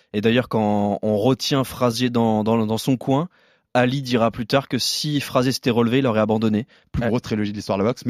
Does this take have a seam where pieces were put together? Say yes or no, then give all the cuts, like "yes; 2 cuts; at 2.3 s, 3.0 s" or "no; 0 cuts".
yes; 1 cut; at 6.9 s